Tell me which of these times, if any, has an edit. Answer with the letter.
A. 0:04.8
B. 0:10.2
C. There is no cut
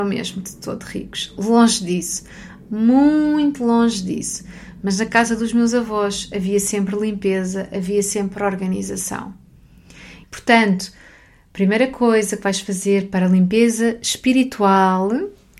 B